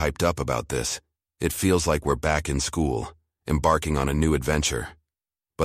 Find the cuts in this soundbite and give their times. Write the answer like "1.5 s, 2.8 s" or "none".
none